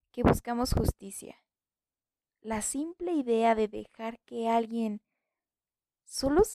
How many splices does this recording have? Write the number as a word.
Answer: zero